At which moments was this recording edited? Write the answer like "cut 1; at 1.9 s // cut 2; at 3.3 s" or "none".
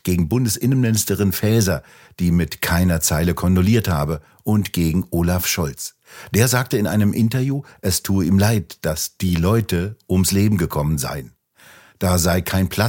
none